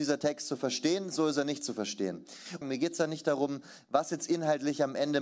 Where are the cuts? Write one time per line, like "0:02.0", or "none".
0:02.6